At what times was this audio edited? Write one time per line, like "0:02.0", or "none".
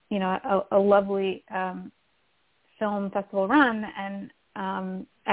none